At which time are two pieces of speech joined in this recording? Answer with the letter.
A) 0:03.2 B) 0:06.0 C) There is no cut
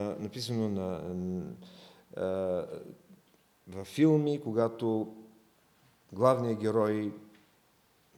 C